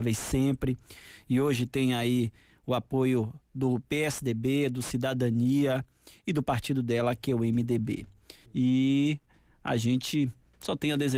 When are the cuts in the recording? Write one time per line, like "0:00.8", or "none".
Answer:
0:08.4